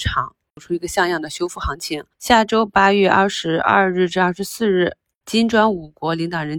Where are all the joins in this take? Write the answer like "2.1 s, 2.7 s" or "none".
2.1 s